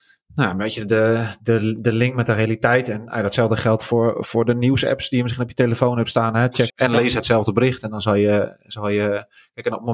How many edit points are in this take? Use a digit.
1